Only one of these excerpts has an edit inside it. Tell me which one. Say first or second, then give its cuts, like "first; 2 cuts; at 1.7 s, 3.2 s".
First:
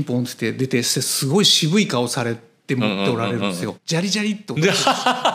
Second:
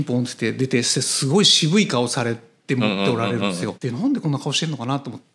first; 1 cut; at 3.8 s